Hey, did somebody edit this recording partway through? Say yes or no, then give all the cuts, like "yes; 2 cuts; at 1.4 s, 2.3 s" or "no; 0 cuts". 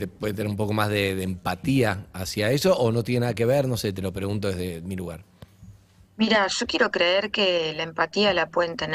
no; 0 cuts